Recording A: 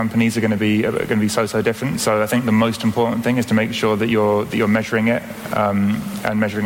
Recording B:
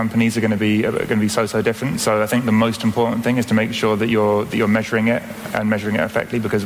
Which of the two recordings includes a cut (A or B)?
B